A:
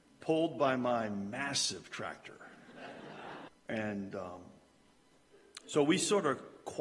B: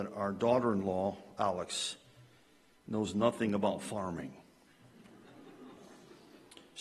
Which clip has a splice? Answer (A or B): A